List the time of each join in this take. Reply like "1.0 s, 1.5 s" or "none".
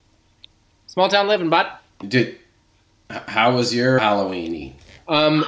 4.0 s